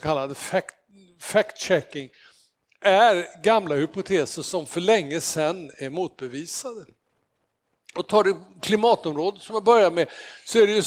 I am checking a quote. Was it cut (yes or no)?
no